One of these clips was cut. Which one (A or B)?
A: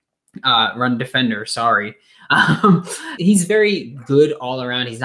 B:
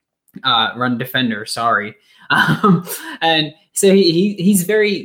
A